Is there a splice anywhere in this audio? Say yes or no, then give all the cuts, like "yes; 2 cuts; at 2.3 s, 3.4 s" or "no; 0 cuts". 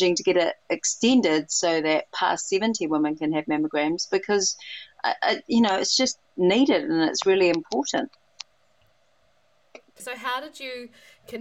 yes; 1 cut; at 10.0 s